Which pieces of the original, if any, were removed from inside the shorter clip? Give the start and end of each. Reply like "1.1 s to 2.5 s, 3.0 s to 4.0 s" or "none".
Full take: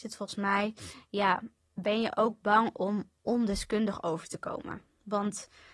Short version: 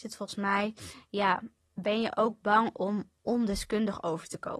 none